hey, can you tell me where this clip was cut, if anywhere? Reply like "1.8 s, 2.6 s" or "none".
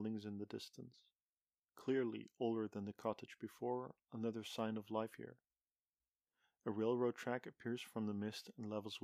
1.6 s